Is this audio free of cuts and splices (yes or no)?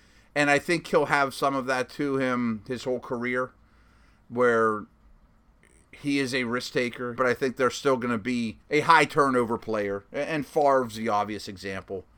no